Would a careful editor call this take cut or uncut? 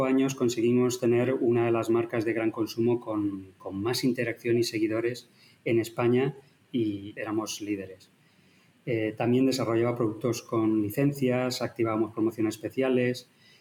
cut